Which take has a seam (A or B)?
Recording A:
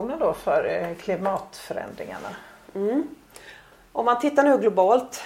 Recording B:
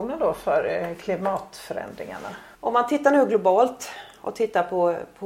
B